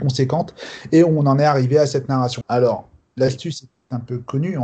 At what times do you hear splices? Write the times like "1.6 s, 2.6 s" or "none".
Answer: 2.4 s